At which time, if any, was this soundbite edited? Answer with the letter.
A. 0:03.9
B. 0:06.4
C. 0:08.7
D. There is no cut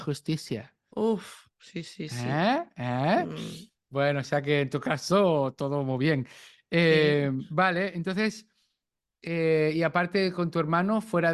D